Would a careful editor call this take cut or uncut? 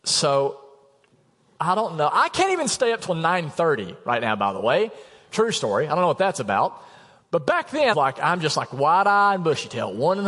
cut